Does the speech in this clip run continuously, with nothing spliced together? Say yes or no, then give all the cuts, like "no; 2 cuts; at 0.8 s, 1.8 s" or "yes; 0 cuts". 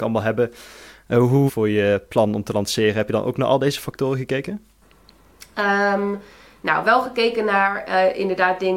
no; 1 cut; at 1.5 s